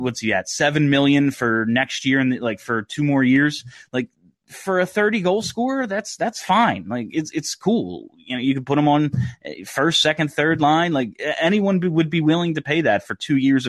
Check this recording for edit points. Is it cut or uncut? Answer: uncut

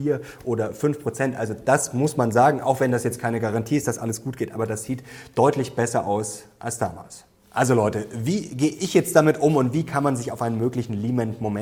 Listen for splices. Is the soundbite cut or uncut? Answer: uncut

